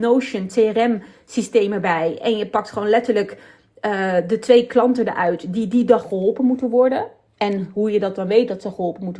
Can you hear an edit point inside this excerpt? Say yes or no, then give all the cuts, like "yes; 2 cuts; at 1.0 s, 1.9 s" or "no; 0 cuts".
no; 0 cuts